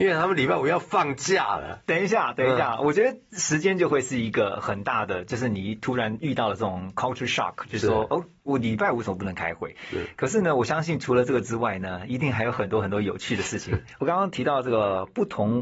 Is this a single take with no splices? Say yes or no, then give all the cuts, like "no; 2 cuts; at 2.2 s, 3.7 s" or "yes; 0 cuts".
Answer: yes; 0 cuts